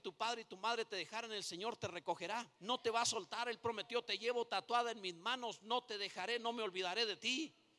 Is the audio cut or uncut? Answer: cut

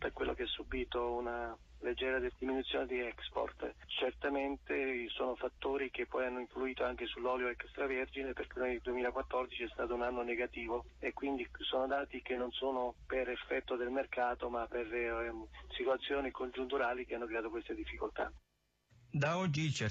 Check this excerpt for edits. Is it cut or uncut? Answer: uncut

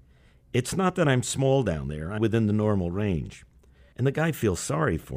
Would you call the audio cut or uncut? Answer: cut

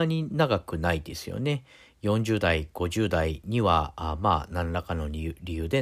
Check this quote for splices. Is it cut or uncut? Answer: uncut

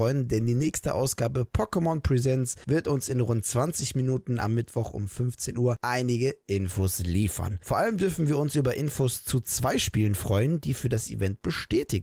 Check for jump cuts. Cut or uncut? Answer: uncut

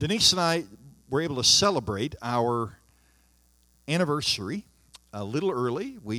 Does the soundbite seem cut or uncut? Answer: cut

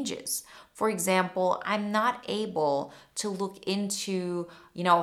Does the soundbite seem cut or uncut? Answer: uncut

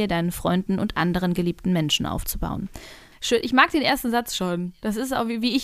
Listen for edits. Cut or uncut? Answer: cut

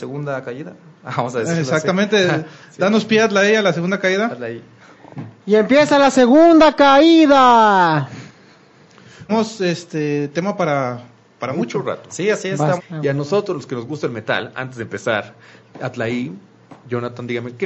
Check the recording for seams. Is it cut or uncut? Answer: cut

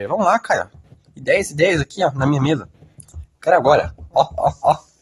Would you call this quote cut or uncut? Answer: uncut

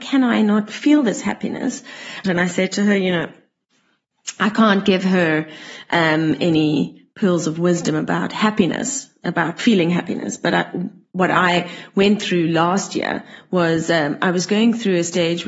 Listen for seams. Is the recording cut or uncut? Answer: cut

